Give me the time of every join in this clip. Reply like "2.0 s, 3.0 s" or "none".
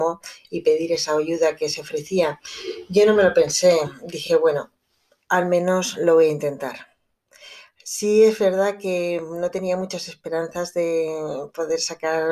none